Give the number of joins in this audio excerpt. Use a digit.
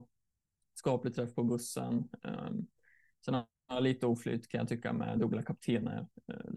0